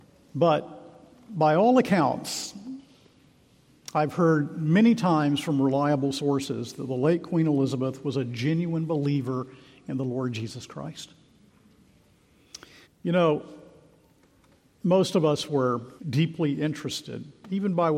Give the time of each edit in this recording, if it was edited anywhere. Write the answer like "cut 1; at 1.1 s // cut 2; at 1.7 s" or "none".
cut 1; at 12.8 s // cut 2; at 16.0 s